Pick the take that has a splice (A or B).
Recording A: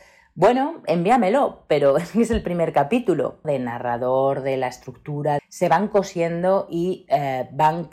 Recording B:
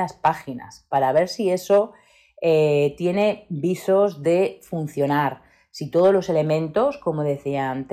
A